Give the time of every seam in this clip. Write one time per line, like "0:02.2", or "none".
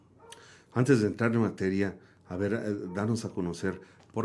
none